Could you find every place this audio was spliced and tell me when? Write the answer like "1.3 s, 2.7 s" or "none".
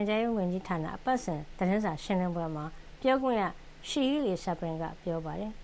none

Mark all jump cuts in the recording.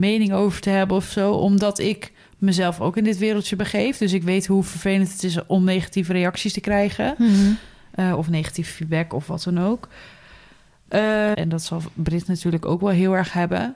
11.3 s

